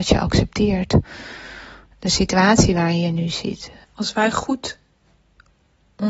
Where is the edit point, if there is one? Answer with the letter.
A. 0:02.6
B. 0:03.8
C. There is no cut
B